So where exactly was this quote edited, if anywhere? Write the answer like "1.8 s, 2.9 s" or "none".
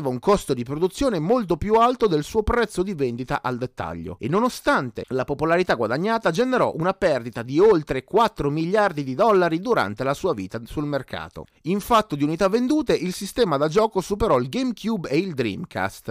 none